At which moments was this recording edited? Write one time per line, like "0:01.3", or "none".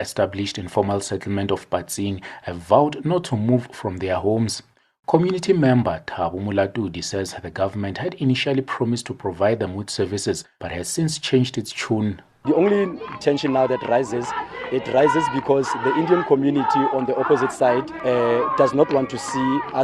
none